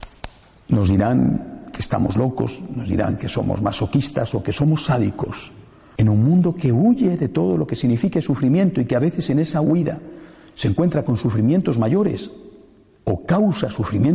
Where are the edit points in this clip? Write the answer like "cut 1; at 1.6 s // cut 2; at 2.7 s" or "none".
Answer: cut 1; at 6.0 s